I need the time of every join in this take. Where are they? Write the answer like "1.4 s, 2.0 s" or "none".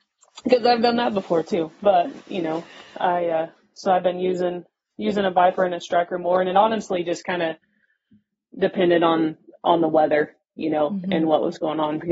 none

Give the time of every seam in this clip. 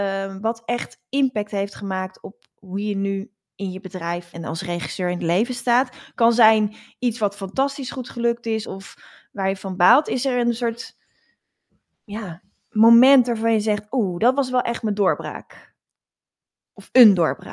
4.3 s, 8.6 s

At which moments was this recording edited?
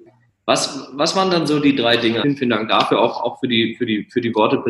2.2 s

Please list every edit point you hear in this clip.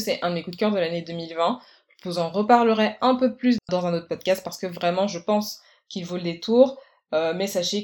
none

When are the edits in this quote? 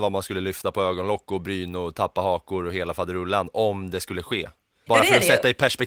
4.9 s

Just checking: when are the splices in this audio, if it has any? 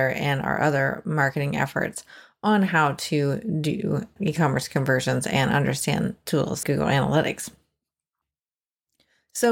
4.2 s, 6.6 s

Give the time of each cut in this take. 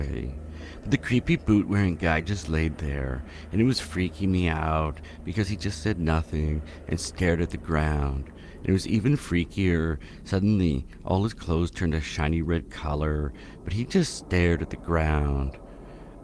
none

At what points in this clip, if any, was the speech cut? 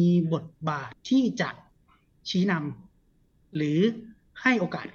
0.9 s

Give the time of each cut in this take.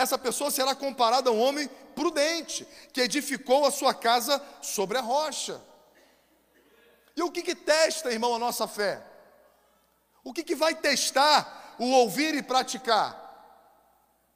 none

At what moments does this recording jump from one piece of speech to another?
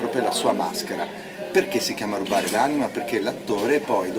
none

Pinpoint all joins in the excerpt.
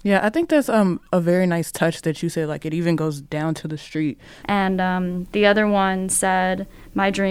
4.4 s

